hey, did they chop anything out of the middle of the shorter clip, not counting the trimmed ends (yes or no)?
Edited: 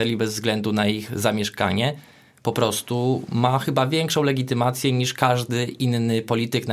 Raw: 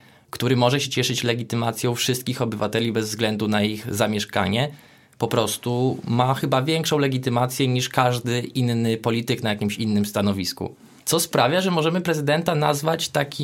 no